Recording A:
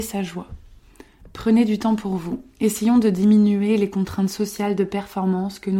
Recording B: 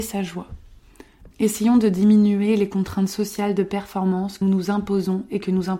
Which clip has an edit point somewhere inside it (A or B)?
B